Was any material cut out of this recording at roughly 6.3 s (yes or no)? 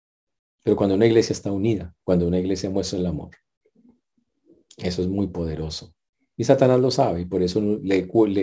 yes